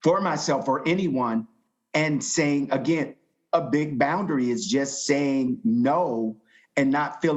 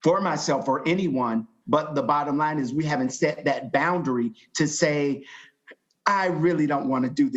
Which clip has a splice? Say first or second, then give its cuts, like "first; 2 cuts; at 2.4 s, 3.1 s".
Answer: second; 1 cut; at 1.6 s